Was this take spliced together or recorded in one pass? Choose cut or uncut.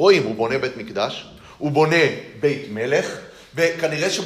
uncut